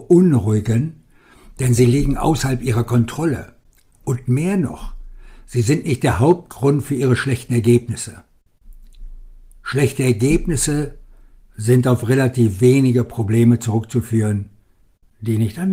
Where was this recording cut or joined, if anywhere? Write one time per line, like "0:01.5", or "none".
none